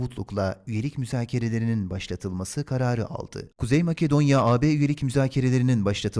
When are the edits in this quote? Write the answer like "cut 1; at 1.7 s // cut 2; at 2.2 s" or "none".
cut 1; at 3.5 s

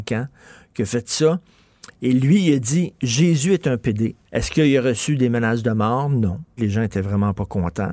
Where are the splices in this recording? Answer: cut 1; at 4.3 s // cut 2; at 6.6 s

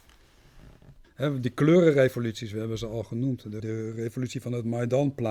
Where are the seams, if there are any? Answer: cut 1; at 1.0 s // cut 2; at 3.6 s

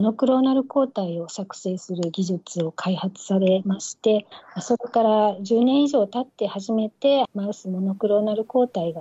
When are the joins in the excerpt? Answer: cut 1; at 7.3 s

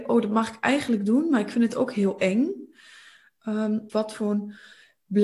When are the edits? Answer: cut 1; at 3.9 s

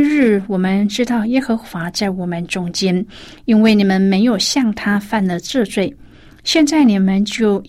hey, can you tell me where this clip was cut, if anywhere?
none

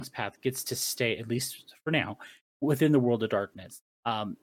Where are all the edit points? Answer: none

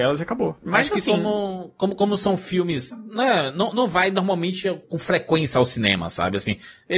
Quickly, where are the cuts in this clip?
cut 1; at 2.9 s // cut 2; at 4.8 s

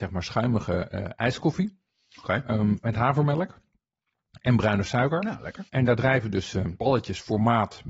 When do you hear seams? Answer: cut 1; at 5.7 s // cut 2; at 6.8 s

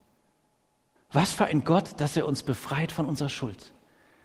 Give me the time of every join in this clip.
cut 1; at 1.0 s

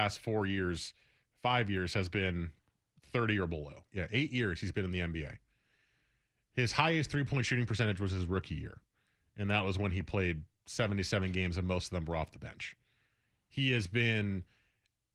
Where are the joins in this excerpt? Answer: cut 1; at 3.9 s

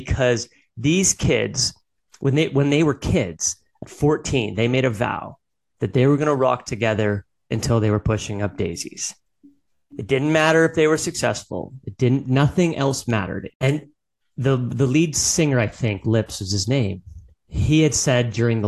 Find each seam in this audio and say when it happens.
cut 1; at 13.5 s

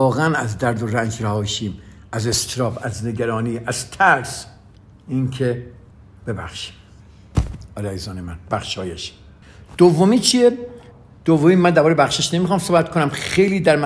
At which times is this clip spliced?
none

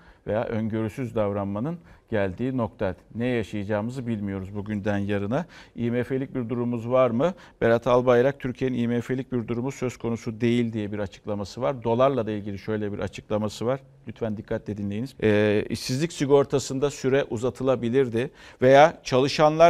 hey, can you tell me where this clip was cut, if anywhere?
cut 1; at 15.1 s

